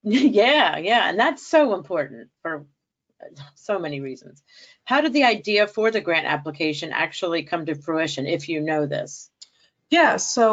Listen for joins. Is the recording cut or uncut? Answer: uncut